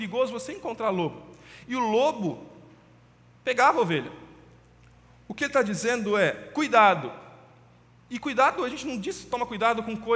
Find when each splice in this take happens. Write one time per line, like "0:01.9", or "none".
none